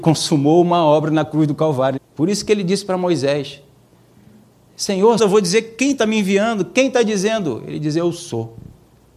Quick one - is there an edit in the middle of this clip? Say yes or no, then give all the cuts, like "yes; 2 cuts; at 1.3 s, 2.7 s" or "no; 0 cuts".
yes; 2 cuts; at 2.0 s, 5.2 s